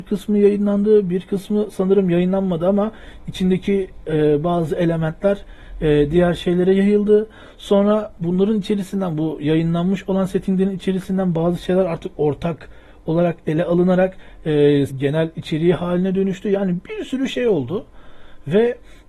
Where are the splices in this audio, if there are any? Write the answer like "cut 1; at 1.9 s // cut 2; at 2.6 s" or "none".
cut 1; at 14.9 s